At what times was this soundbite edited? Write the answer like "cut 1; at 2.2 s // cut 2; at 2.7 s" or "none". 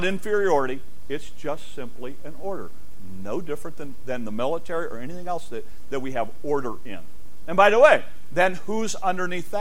none